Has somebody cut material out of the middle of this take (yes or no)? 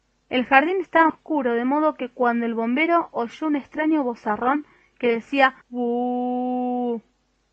yes